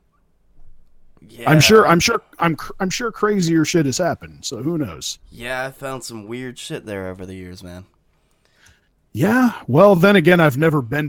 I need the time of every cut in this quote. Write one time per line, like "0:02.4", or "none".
none